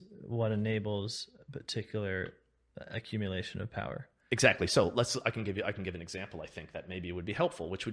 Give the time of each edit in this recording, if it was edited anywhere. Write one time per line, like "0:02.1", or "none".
none